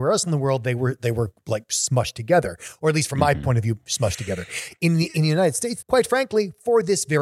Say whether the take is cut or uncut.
cut